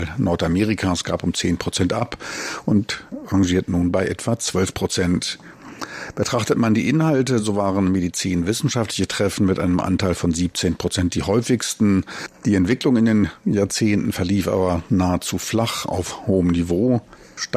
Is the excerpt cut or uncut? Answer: uncut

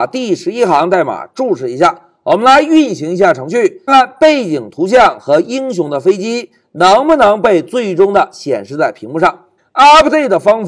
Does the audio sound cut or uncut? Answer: cut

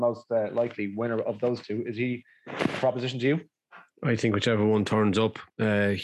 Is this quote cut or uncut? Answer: uncut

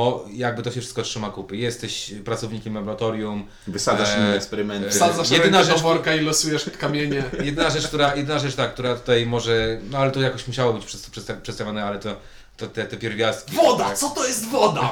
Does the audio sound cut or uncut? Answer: uncut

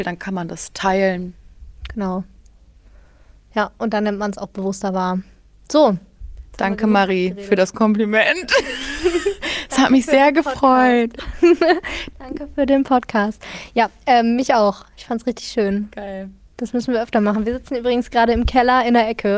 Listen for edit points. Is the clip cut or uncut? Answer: uncut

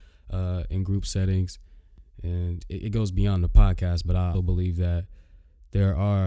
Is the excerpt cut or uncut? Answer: cut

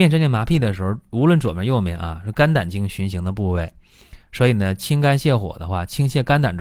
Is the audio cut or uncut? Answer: uncut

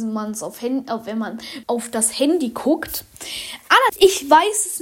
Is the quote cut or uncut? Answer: cut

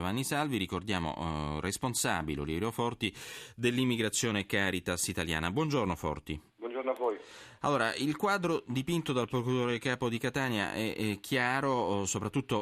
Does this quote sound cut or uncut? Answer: cut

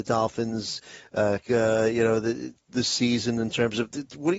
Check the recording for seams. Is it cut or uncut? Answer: cut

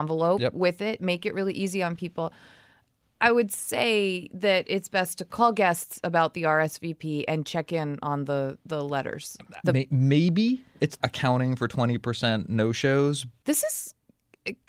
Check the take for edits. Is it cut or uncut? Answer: cut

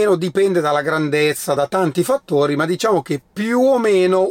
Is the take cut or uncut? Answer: uncut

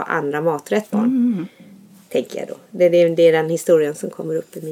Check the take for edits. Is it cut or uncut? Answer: cut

